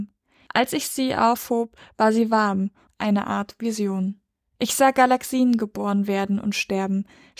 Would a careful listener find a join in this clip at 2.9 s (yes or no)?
yes